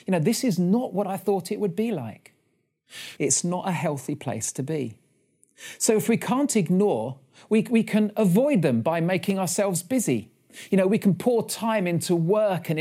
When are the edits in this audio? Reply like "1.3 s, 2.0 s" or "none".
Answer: 3.2 s